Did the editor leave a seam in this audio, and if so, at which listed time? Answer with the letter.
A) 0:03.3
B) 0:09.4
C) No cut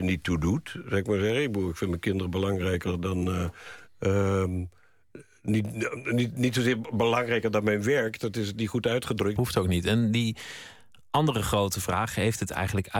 B